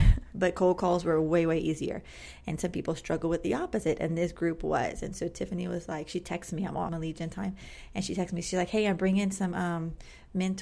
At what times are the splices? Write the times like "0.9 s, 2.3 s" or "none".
6.9 s